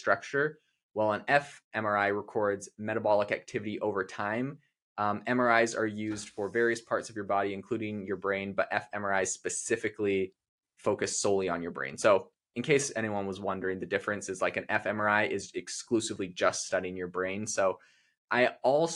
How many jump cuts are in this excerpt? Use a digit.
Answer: 0